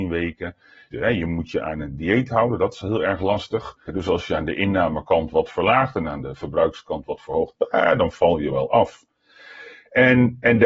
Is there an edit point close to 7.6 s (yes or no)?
no